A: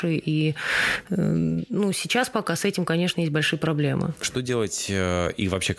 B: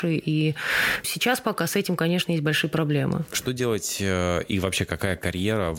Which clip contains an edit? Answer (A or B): B